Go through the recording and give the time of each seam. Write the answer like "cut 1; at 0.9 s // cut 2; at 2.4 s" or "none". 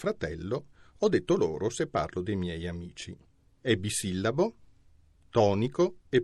cut 1; at 3.6 s